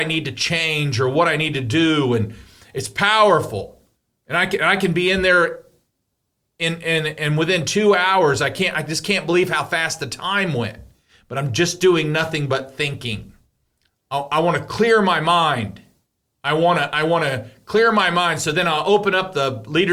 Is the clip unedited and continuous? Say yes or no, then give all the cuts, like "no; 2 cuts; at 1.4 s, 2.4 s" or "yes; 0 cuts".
no; 1 cut; at 13.9 s